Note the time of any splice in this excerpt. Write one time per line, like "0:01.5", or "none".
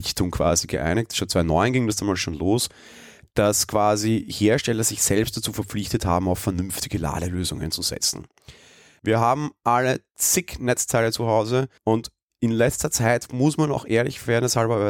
0:09.0
0:11.8